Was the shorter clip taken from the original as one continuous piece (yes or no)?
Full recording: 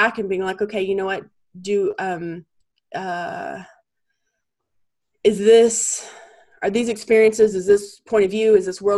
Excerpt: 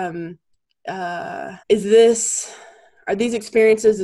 no